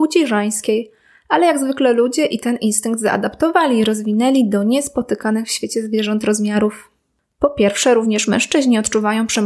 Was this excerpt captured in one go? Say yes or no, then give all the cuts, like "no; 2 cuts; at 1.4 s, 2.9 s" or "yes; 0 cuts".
yes; 0 cuts